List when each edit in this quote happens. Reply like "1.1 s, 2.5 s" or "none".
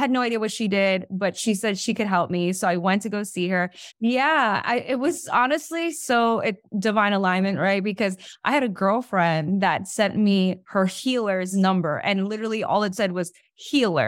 3.9 s